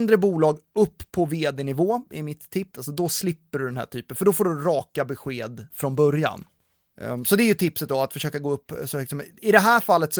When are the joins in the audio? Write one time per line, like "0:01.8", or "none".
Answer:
0:02.7